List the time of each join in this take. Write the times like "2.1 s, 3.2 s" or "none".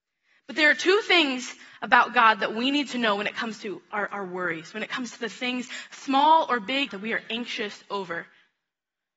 6.9 s